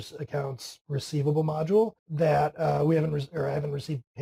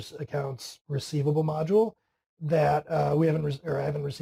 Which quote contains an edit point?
first; 1 cut; at 2.0 s

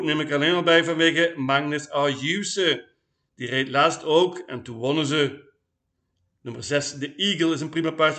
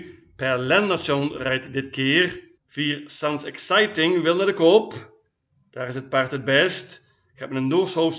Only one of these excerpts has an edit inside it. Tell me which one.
second; 1 cut; at 2.6 s

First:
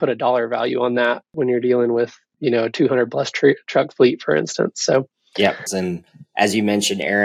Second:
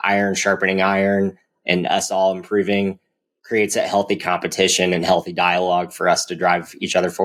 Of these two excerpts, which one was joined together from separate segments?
first; 1 cut; at 5.7 s

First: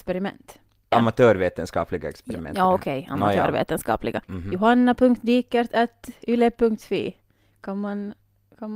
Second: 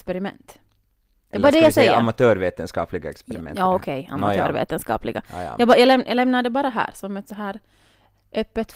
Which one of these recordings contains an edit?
first; 2 cuts; at 0.9 s, 4.2 s

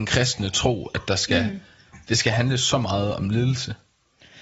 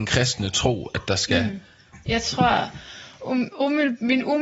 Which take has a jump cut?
second; 2 cuts; at 2.1 s, 3.5 s

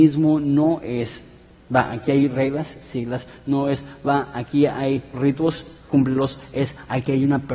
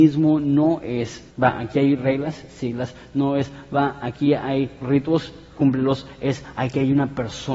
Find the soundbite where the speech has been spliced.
second; 1 cut; at 1.3 s

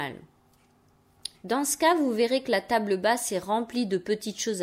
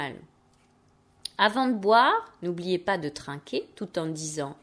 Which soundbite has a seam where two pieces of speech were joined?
first; 1 cut; at 1.3 s

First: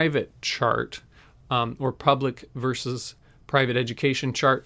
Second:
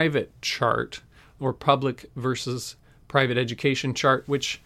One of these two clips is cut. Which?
second; 1 cut; at 1.4 s

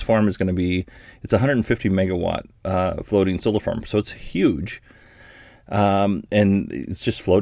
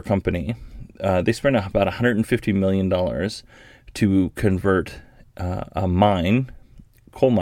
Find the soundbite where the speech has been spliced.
first; 1 cut; at 2.6 s

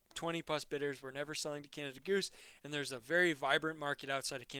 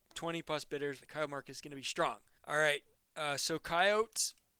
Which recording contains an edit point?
second; 2 cuts; at 1.0 s, 2.4 s

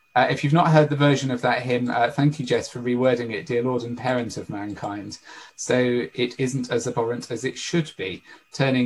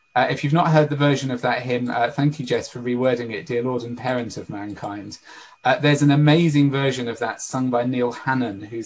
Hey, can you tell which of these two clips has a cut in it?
first; 1 cut; at 5.5 s

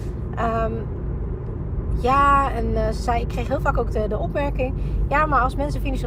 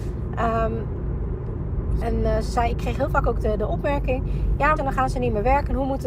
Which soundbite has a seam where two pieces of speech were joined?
second; 2 cuts; at 2.0 s, 4.8 s

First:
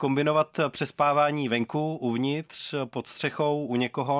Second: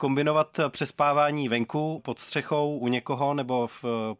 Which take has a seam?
second; 1 cut; at 2.0 s

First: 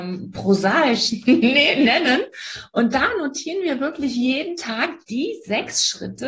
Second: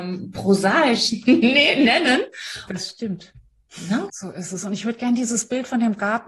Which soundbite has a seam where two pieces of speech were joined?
second; 2 cuts; at 2.7 s, 4.1 s

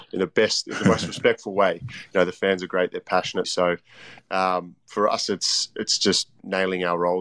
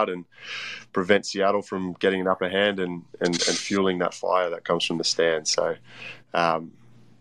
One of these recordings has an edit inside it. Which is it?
first; 1 cut; at 3.4 s

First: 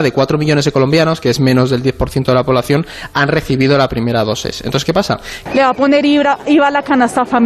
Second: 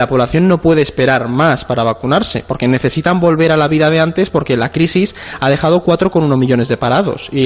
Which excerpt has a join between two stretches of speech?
first; 1 cut; at 5.5 s

